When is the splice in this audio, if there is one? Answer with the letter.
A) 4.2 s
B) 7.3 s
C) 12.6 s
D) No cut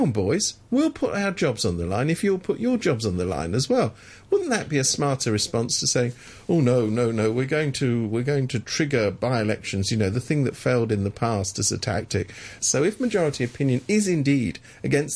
C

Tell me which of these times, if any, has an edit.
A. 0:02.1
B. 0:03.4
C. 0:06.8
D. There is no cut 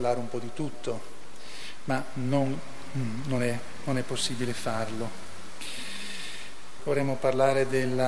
C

